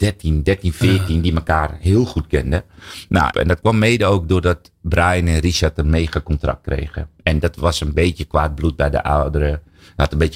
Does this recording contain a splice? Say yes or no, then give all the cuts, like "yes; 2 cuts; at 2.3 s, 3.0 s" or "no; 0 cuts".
yes; 1 cut; at 3.3 s